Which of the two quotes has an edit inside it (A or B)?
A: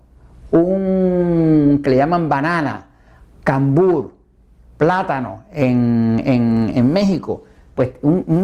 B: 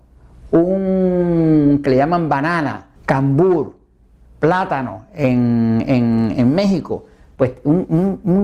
B